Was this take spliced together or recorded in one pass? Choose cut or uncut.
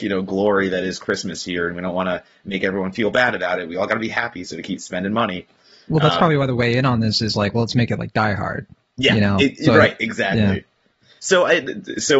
uncut